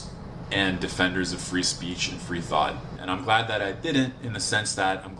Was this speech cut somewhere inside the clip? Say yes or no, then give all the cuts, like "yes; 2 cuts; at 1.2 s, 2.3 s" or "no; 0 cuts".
yes; 1 cut; at 3.0 s